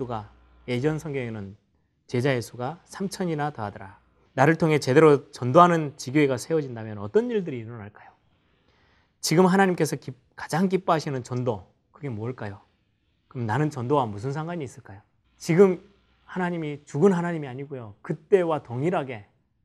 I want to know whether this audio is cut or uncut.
cut